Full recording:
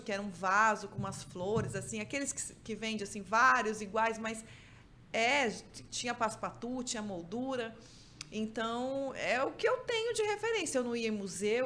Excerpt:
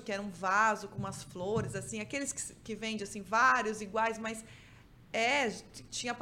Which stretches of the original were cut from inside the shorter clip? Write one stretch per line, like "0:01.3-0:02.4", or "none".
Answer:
none